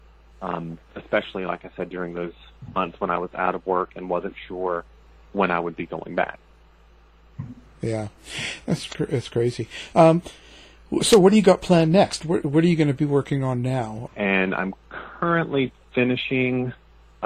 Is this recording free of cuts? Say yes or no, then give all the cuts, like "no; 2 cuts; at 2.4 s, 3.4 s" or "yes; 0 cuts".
no; 2 cuts; at 12.4 s, 14.1 s